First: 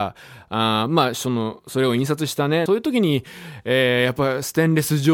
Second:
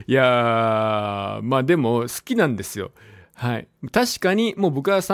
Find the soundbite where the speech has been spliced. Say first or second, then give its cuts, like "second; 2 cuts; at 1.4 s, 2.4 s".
first; 1 cut; at 2.7 s